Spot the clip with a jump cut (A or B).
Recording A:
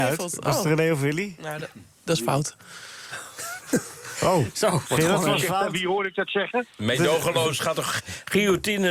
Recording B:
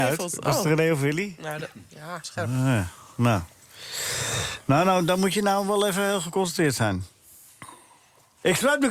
B